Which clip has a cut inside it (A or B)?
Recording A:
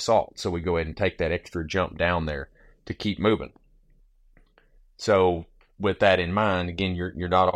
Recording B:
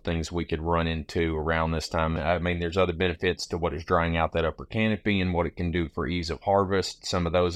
B